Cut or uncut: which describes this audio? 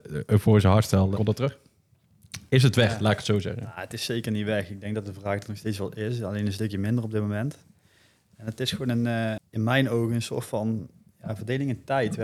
cut